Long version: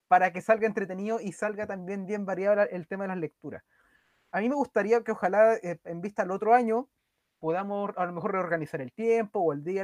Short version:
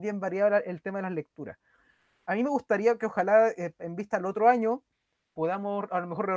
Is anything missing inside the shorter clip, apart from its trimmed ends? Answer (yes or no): no